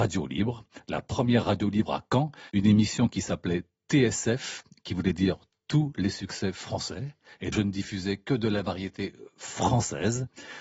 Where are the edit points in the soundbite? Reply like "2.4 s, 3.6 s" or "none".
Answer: 2.5 s, 7.5 s